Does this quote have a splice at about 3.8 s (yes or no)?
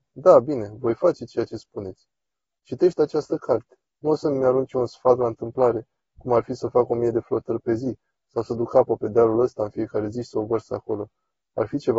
yes